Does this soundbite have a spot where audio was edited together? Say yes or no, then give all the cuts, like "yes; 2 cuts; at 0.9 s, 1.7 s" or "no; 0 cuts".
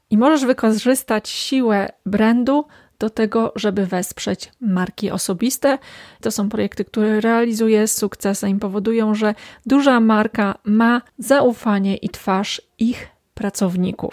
yes; 2 cuts; at 6.2 s, 11.1 s